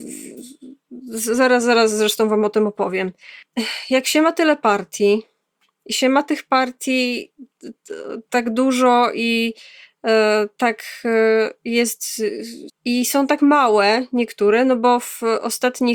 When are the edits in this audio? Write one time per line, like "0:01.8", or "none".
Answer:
0:12.7